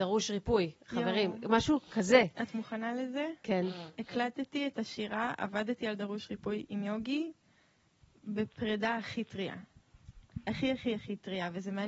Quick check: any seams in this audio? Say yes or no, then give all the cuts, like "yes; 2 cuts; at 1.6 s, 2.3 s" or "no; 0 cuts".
no; 0 cuts